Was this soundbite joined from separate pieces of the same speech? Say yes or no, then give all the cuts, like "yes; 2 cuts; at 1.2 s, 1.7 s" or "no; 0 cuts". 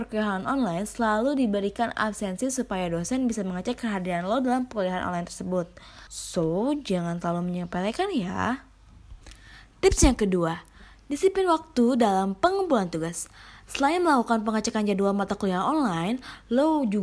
yes; 1 cut; at 6.1 s